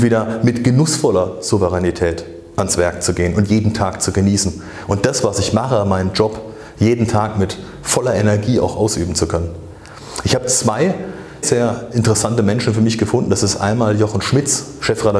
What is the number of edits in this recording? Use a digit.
1